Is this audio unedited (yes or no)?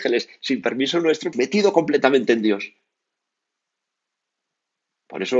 no